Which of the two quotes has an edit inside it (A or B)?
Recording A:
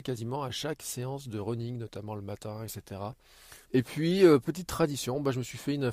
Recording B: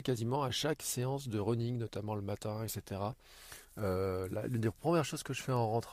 A